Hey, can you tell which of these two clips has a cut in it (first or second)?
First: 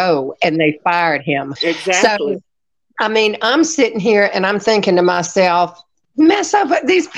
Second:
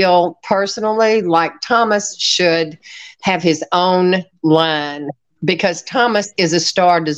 first